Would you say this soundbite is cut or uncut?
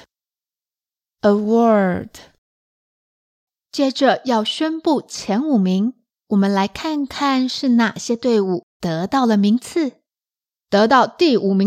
uncut